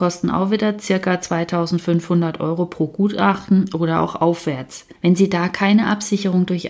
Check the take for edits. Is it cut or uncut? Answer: cut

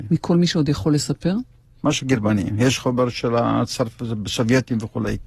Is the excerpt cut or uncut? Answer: cut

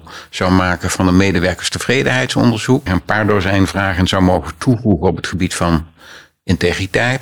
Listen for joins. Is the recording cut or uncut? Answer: cut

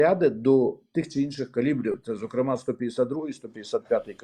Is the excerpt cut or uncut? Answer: uncut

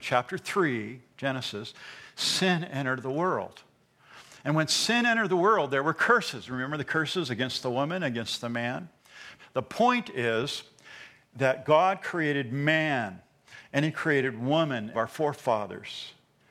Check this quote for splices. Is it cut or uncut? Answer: cut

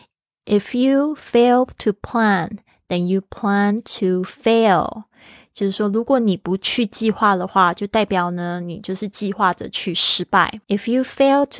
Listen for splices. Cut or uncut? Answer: cut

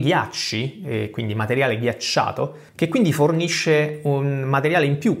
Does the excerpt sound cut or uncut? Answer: cut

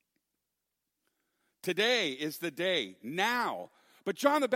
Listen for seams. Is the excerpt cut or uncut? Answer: cut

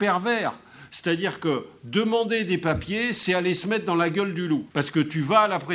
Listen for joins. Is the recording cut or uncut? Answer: cut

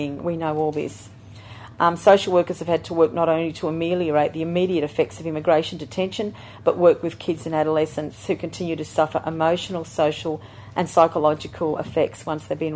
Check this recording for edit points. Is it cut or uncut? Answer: uncut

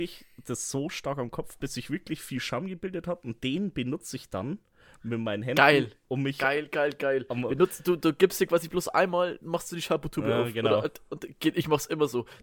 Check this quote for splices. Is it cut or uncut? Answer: uncut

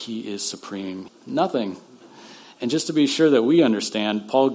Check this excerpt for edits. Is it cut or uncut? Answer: cut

